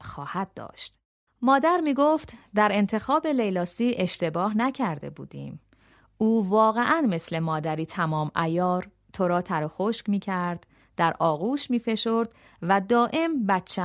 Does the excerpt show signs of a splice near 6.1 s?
no; 1 cut; at 1.3 s

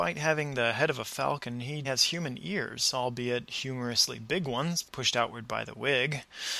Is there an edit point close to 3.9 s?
no; 1 cut; at 1.8 s

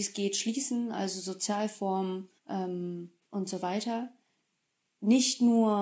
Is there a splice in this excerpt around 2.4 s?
yes; 1 cut; at 2.4 s

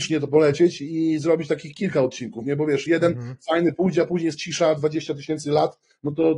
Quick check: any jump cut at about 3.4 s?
no; 0 cuts

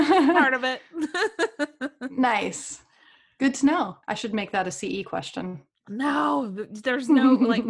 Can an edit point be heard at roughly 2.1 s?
no; 1 cut; at 4.0 s

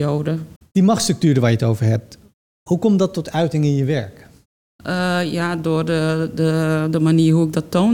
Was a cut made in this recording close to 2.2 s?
no; 0 cuts

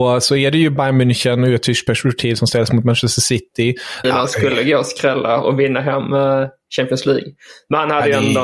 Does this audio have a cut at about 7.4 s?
no; 1 cut; at 4.0 s

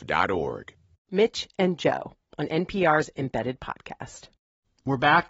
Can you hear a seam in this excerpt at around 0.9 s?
yes; 1 cut; at 0.9 s

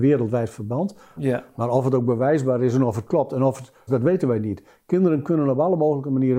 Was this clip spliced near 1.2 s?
yes; 2 cuts; at 1.2 s, 3.9 s

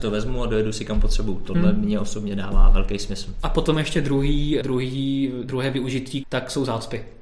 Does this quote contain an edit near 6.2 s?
yes; 2 cuts; at 4.6 s, 6.2 s

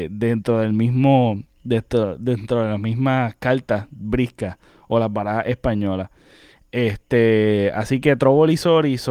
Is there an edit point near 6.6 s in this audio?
yes; 1 cut; at 6.6 s

